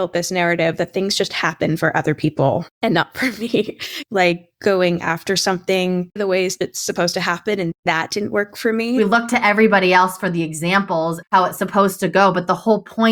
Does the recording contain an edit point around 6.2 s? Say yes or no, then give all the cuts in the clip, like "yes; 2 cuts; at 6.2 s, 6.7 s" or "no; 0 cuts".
yes; 1 cut; at 6.2 s